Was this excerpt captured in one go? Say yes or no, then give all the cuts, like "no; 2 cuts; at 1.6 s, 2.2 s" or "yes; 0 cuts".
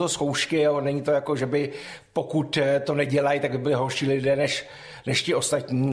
yes; 0 cuts